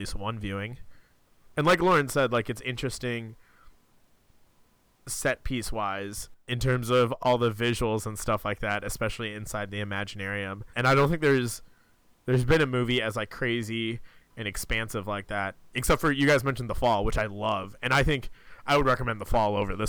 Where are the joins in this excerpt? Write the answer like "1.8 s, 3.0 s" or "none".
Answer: none